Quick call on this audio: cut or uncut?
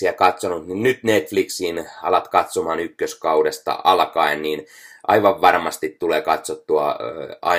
uncut